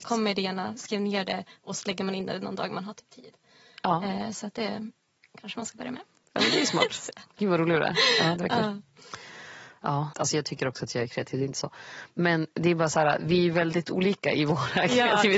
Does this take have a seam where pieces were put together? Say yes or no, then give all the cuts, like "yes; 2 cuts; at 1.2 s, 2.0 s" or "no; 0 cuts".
yes; 1 cut; at 10.1 s